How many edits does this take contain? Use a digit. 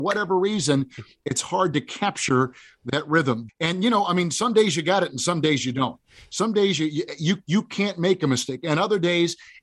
1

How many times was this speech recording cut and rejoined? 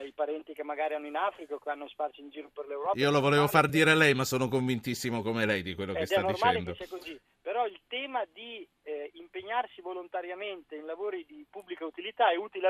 0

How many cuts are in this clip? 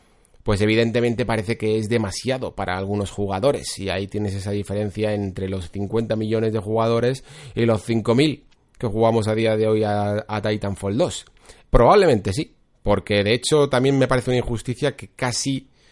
1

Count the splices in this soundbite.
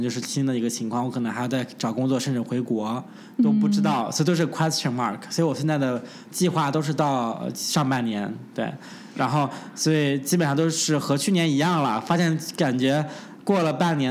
0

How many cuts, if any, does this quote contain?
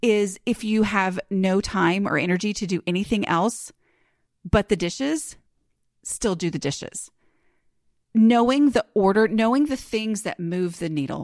0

